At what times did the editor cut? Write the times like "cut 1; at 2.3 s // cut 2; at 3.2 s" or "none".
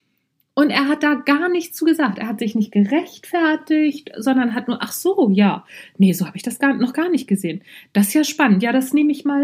none